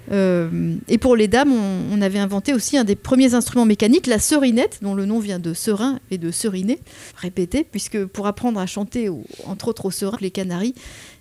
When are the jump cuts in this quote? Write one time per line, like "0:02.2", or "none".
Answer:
0:07.1
0:10.1